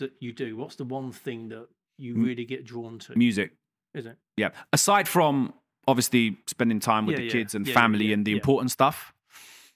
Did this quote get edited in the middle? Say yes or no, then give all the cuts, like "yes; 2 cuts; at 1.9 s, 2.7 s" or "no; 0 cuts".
no; 0 cuts